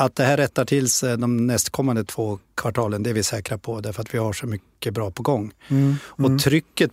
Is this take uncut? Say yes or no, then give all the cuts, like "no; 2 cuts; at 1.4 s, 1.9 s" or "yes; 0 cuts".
yes; 0 cuts